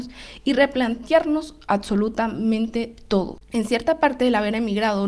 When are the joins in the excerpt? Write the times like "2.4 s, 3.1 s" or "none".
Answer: 3.4 s